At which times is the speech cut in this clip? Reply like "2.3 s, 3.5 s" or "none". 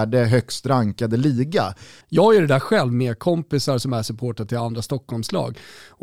2.0 s